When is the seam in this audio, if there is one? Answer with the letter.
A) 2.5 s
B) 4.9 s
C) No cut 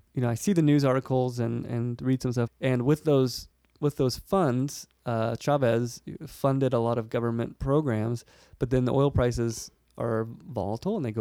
A